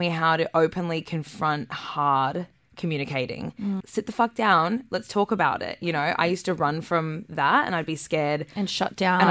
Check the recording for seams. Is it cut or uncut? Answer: cut